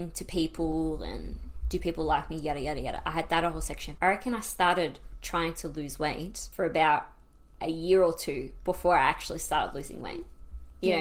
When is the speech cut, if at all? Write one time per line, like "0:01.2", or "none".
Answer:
0:04.0